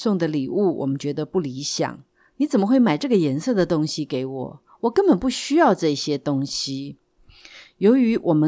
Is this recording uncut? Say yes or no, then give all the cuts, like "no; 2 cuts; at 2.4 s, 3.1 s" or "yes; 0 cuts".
yes; 0 cuts